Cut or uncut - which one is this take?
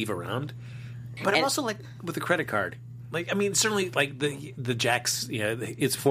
cut